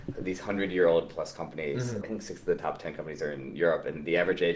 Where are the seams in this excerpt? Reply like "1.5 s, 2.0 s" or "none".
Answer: 2.0 s